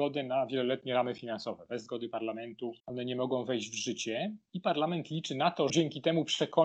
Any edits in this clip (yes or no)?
yes